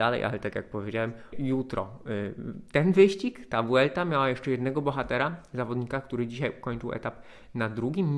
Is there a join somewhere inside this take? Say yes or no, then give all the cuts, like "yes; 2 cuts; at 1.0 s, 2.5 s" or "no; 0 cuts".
yes; 1 cut; at 1.3 s